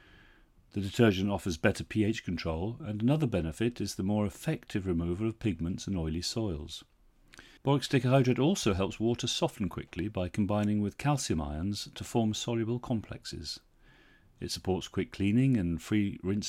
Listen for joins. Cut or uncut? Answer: cut